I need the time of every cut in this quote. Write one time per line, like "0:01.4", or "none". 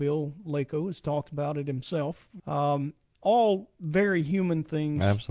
0:02.4